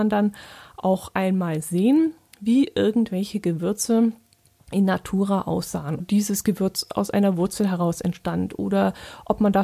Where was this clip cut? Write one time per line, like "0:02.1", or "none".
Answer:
0:06.0